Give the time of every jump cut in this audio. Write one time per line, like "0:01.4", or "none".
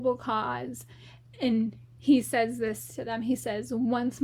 none